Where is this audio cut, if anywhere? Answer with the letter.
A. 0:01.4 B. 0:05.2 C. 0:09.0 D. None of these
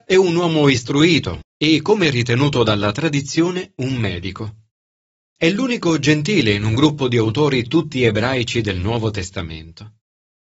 A